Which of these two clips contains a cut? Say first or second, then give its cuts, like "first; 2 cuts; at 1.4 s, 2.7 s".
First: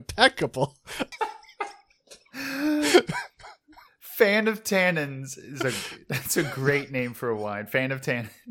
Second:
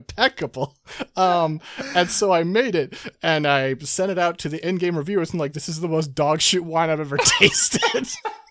first; 1 cut; at 1.1 s